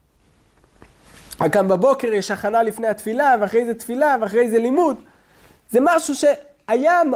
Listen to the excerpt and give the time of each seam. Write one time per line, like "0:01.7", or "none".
none

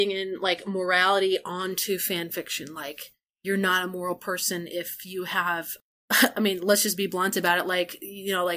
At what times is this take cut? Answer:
none

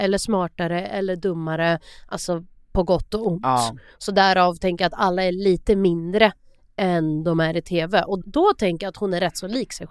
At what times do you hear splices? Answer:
0:08.2

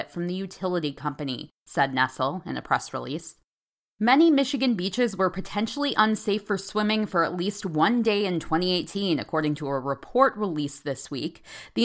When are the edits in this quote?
none

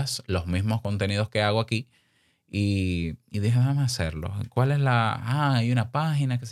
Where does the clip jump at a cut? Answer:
none

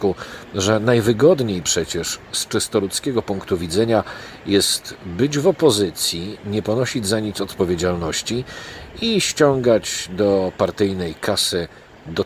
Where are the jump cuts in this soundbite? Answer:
none

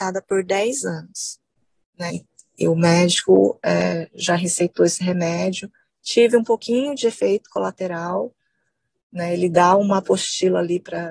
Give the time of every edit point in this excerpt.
0:02.1

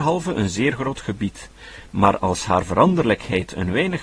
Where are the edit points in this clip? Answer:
none

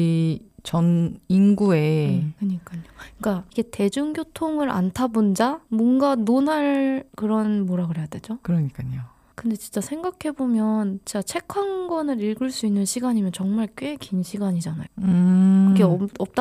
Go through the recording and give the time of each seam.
0:02.4
0:08.4
0:14.9

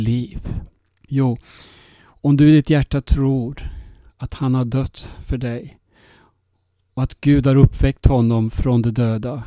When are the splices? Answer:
0:01.1

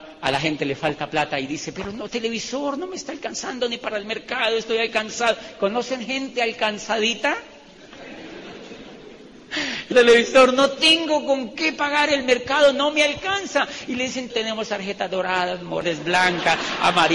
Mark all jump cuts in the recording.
0:09.9
0:14.3

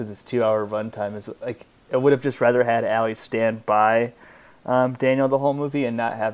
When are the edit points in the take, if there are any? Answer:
none

